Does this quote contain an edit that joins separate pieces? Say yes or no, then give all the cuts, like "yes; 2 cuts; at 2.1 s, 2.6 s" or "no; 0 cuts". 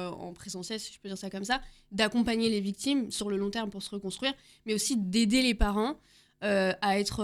no; 0 cuts